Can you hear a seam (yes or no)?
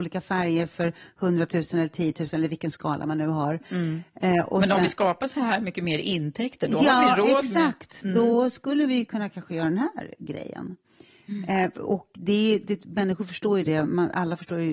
no